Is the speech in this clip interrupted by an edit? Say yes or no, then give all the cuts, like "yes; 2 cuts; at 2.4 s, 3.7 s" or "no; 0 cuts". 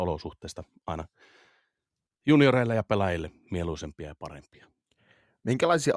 no; 0 cuts